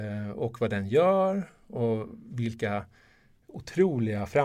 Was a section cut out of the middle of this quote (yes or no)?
no